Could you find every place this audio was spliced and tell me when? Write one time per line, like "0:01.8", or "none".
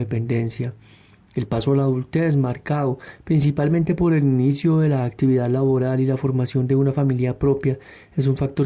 none